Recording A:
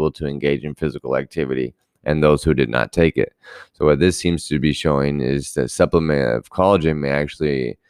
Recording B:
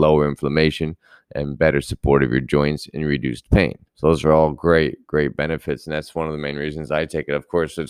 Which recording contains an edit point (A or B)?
B